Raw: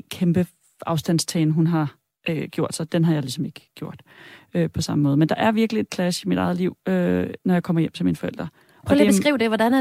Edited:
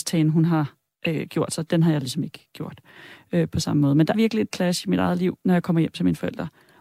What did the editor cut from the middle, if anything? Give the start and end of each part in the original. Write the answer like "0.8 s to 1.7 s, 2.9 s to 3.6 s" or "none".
5.4 s to 5.5 s, 6.8 s to 7.4 s

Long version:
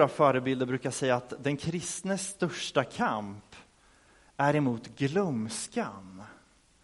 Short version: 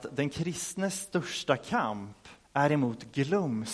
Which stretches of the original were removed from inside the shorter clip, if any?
3.7 s to 4.3 s

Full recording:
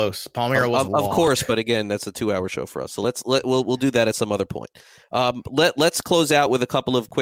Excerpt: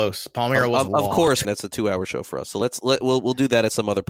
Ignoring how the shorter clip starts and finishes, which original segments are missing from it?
1.4 s to 1.9 s

